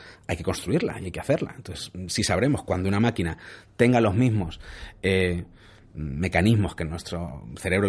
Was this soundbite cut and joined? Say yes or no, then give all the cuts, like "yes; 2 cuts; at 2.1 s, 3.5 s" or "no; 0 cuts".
no; 0 cuts